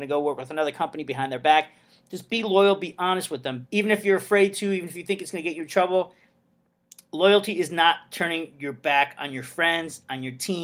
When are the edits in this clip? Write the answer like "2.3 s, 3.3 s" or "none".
3.7 s